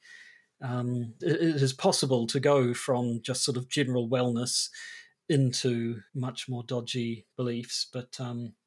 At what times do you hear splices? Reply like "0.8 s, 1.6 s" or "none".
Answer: 1.2 s, 6.1 s